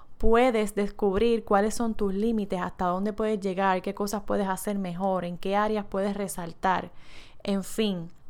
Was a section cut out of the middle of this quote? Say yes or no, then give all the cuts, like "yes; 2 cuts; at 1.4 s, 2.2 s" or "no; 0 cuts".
no; 0 cuts